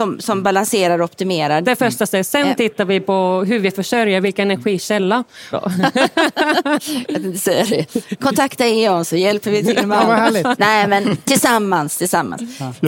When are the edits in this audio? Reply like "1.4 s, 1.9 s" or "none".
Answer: 1.6 s, 5.5 s